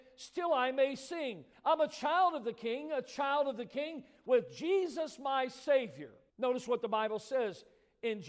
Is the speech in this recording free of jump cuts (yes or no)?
no